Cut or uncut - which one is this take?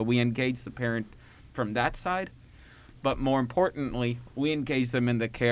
cut